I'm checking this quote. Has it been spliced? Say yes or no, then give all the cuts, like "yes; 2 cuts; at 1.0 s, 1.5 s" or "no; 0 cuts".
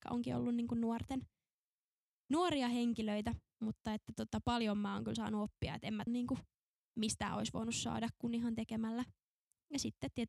yes; 1 cut; at 6.1 s